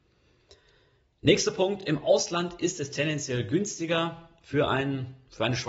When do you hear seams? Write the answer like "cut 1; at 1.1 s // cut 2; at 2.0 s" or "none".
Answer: none